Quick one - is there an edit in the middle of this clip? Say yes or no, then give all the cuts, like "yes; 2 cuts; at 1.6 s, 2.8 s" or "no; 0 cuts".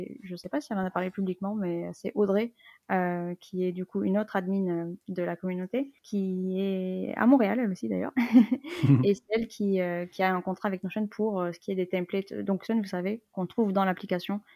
yes; 2 cuts; at 6.0 s, 12.7 s